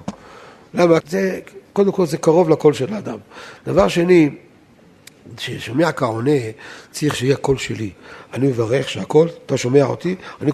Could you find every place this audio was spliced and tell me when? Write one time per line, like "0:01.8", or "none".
0:01.0